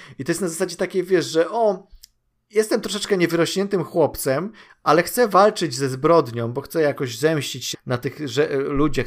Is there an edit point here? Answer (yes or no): yes